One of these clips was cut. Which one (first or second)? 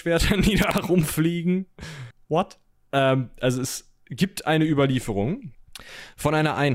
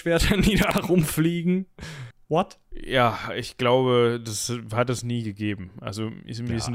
second